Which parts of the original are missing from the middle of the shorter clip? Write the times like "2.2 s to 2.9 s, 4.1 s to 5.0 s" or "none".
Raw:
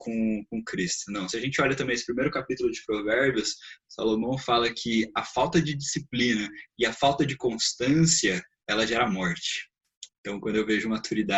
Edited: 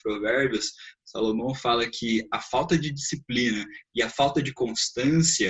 none